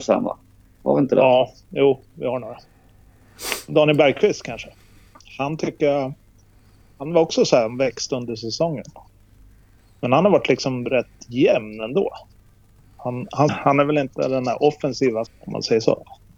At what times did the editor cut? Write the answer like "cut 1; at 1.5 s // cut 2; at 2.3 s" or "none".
cut 1; at 5.2 s // cut 2; at 13.5 s // cut 3; at 15.3 s